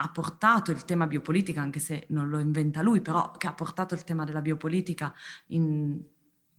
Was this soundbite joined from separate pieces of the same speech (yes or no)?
no